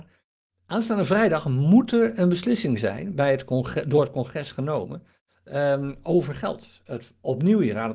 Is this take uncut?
yes; 0 cuts

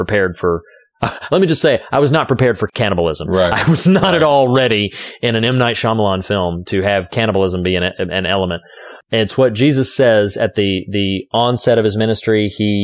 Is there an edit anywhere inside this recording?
yes; 3 cuts; at 1.3 s, 6.7 s, 9.0 s

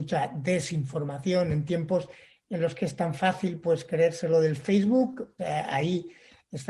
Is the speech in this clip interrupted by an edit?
yes; 1 cut; at 5.4 s

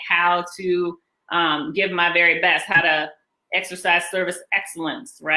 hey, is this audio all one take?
yes; 0 cuts

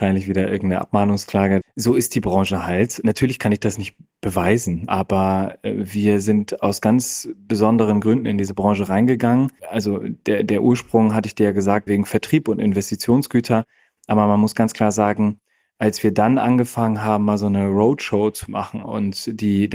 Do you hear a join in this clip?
yes; 3 cuts; at 1.6 s, 9.6 s, 11.9 s

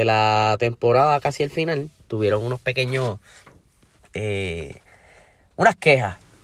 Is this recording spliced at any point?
no; 0 cuts

